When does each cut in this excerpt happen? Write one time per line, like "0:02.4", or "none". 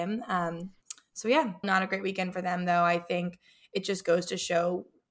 0:01.6